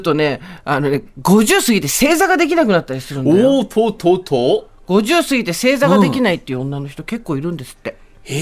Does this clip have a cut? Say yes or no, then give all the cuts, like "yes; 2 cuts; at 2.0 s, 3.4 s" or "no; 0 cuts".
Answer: no; 0 cuts